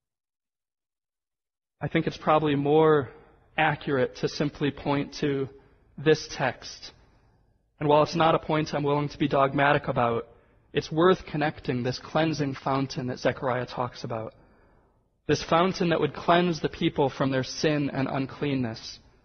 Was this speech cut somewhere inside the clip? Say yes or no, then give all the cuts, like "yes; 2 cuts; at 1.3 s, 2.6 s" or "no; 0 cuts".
no; 0 cuts